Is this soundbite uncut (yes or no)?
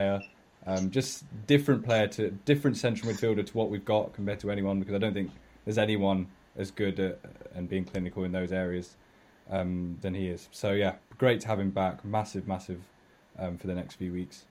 no